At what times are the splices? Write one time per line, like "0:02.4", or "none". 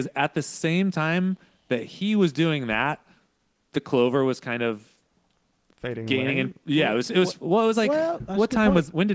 none